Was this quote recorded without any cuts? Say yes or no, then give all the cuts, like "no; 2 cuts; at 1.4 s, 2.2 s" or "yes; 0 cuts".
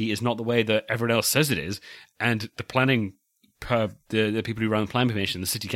yes; 0 cuts